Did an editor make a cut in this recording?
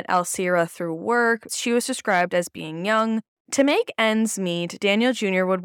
yes; 2 cuts; at 1.5 s, 3.4 s

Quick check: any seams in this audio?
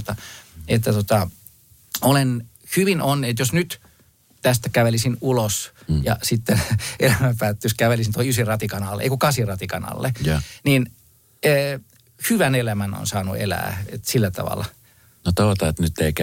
no; 0 cuts

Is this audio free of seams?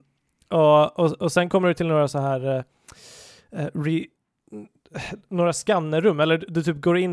yes; 0 cuts

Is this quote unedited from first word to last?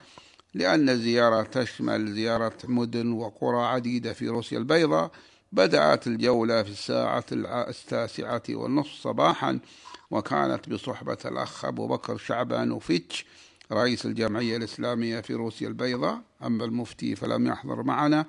yes; 0 cuts

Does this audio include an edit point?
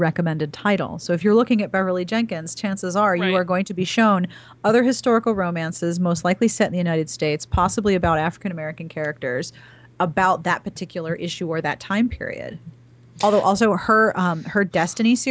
no; 0 cuts

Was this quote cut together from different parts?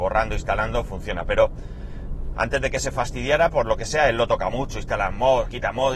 no; 0 cuts

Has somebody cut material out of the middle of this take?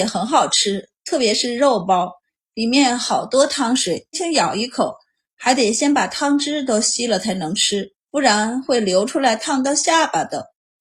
yes; 2 cuts; at 4.1 s, 8.0 s

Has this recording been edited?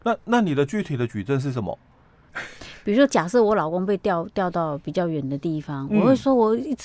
yes; 1 cut; at 2.3 s

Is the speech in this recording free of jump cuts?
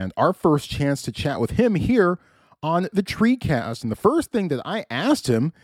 yes; 0 cuts

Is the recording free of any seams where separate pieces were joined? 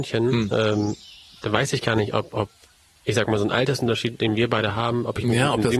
yes; 0 cuts

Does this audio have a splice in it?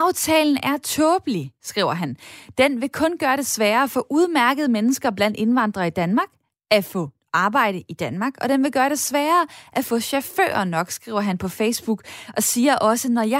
no; 0 cuts

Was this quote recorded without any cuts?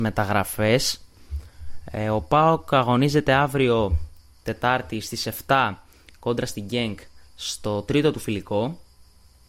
yes; 0 cuts

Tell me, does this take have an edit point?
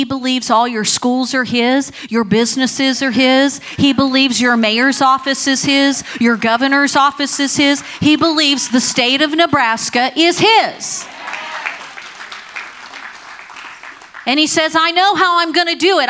no; 0 cuts

